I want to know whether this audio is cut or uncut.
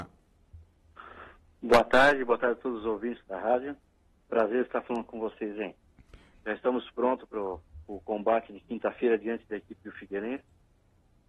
cut